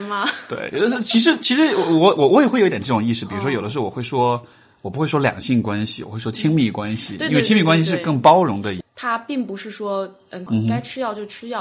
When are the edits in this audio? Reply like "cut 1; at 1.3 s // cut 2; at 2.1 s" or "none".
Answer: cut 1; at 8.8 s // cut 2; at 10.5 s